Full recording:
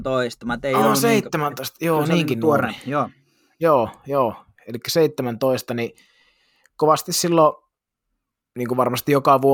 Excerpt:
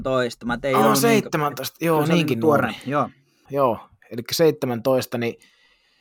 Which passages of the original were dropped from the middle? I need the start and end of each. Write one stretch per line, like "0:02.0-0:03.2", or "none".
0:03.5-0:04.0